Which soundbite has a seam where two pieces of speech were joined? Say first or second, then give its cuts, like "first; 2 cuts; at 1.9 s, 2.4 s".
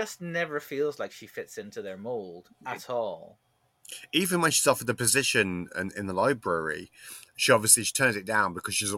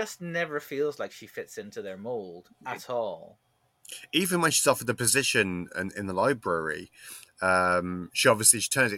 first; 1 cut; at 7.3 s